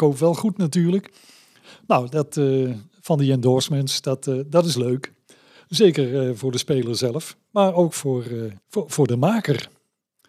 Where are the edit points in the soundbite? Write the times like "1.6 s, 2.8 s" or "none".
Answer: 8.6 s